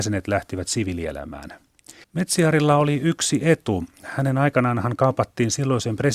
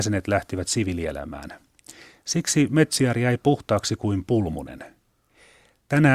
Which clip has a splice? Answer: first; 1 cut; at 2.0 s

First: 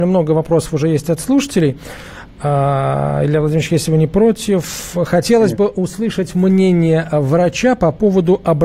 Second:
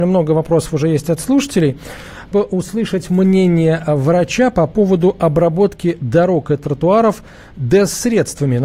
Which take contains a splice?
second; 1 cut; at 2.3 s

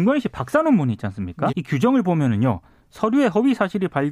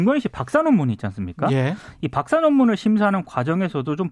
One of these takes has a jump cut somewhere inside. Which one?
first; 1 cut; at 1.5 s

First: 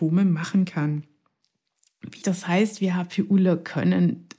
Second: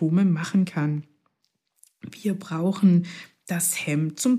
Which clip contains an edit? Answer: first; 1 cut; at 2.2 s

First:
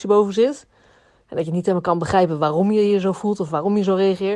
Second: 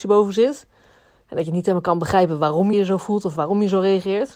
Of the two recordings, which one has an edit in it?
second; 1 cut; at 2.7 s

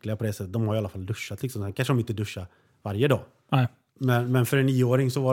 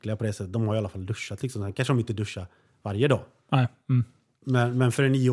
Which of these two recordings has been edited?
first; 1 cut; at 3.9 s

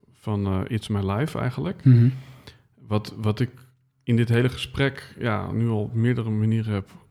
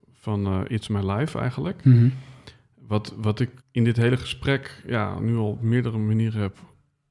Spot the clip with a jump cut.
second; 1 cut; at 3.6 s

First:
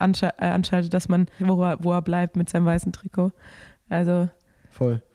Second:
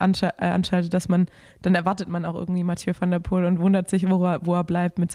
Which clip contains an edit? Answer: first; 1 cut; at 1.4 s

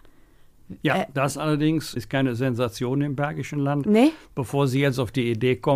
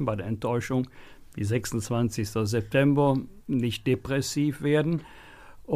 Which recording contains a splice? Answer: first; 1 cut; at 1.9 s

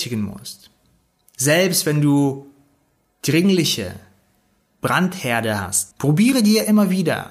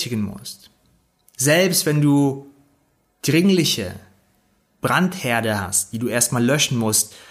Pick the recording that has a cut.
first; 1 cut; at 5.9 s

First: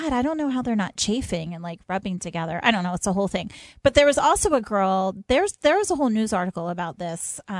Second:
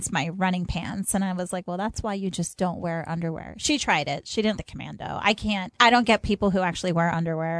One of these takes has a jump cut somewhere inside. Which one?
second; 2 cuts; at 4.6 s, 5.8 s

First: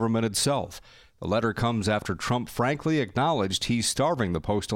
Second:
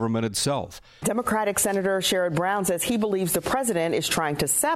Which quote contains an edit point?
second; 1 cut; at 1.0 s

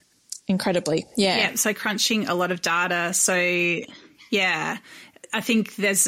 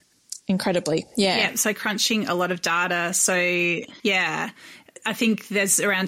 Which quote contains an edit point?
second; 1 cut; at 4.0 s

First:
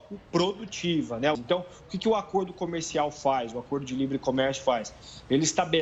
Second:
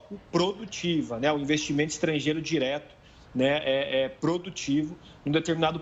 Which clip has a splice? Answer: first; 1 cut; at 1.4 s

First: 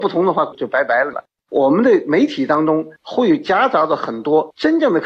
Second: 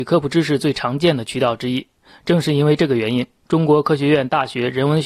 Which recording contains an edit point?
first; 1 cut; at 1.4 s

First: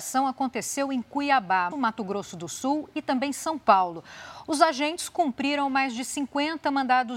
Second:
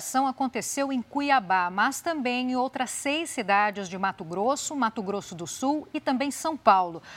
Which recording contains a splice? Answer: first; 1 cut; at 1.7 s

